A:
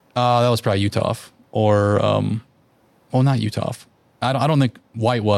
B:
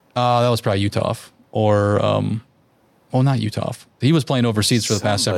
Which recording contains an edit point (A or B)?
B